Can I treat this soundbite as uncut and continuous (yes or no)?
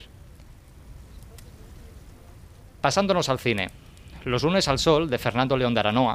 yes